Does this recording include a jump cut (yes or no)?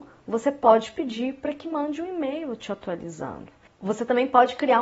yes